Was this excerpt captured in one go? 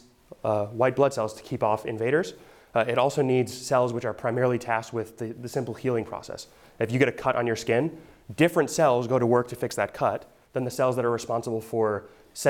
yes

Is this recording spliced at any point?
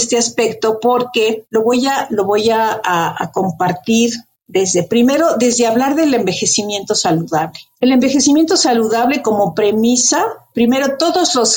no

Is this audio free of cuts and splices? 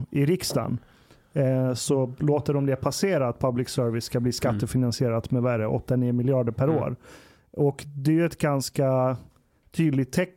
yes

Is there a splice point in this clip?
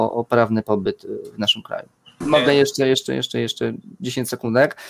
yes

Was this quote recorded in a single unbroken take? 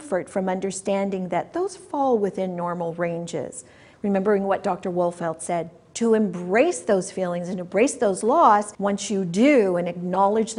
no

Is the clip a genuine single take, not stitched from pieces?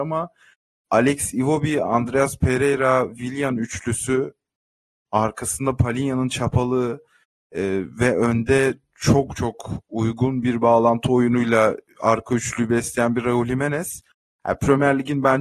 yes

